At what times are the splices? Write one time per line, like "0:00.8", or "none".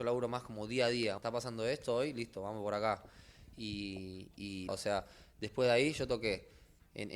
0:01.2
0:04.7